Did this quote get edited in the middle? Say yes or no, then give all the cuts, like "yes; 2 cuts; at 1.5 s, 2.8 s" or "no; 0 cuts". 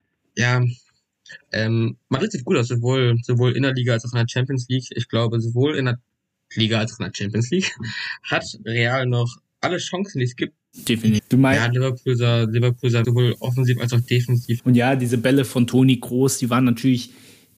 yes; 3 cuts; at 11.2 s, 13.0 s, 14.6 s